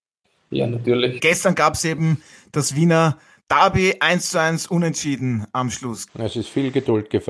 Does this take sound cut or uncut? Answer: cut